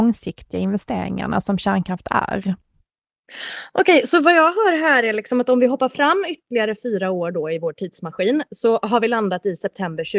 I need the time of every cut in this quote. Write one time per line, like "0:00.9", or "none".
none